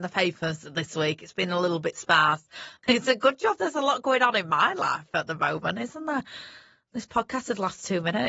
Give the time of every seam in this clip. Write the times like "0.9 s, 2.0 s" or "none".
none